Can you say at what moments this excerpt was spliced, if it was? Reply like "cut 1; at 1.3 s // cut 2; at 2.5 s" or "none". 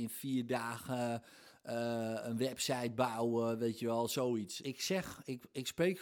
cut 1; at 4.6 s